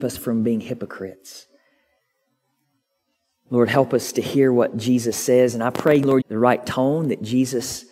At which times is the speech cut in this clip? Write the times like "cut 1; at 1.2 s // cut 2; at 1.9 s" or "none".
cut 1; at 6.2 s